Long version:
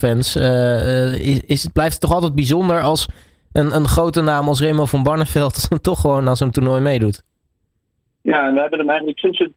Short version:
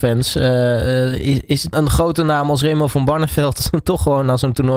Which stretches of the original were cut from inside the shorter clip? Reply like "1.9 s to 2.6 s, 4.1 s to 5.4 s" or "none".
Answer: 1.7 s to 3.7 s